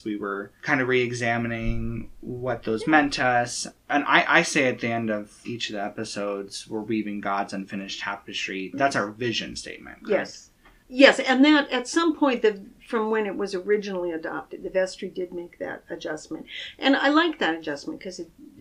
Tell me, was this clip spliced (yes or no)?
no